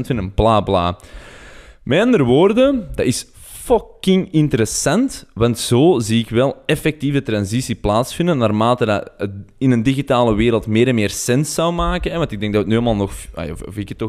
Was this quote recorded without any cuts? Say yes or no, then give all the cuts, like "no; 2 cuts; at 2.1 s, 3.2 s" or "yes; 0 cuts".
yes; 0 cuts